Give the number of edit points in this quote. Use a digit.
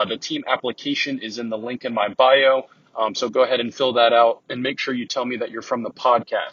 0